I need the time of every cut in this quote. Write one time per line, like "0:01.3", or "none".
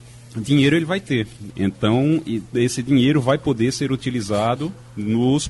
0:01.5